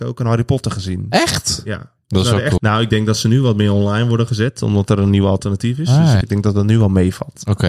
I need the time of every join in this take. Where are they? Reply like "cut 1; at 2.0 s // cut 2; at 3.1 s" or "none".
cut 1; at 2.6 s // cut 2; at 6.2 s

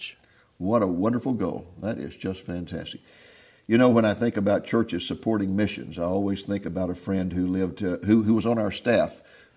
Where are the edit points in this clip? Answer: none

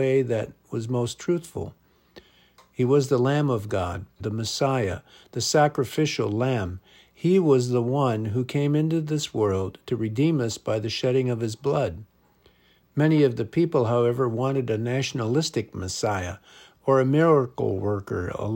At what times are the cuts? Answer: cut 1; at 4.2 s

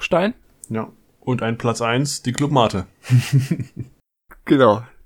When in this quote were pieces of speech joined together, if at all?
none

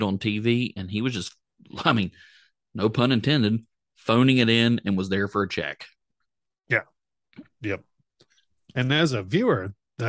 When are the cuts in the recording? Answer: none

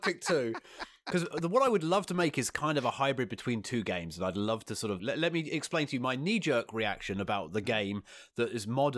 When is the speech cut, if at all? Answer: cut 1; at 5.0 s

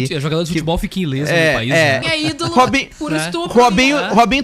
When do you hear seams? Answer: cut 1; at 2.0 s

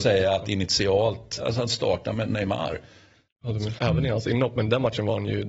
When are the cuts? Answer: cut 1; at 1.4 s // cut 2; at 3.8 s

